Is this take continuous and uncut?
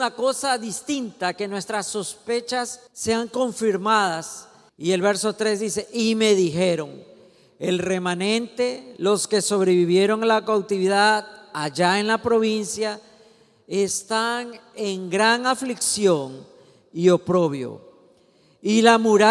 no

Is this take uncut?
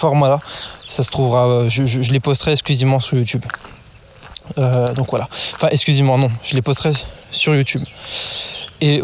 yes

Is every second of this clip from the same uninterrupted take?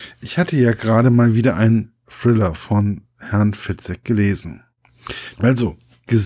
no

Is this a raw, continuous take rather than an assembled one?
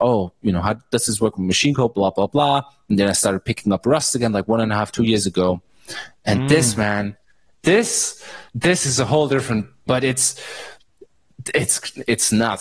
no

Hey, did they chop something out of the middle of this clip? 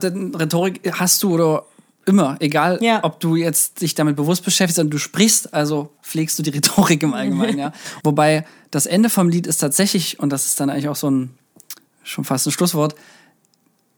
yes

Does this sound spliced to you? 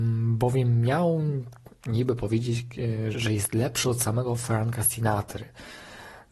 yes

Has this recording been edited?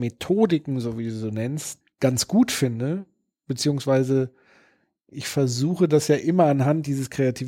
no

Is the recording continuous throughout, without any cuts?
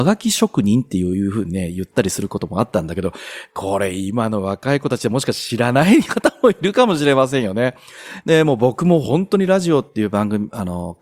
no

